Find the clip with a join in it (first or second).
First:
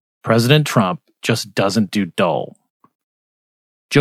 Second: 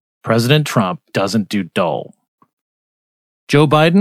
second